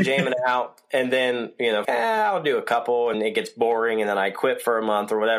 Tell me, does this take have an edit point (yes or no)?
yes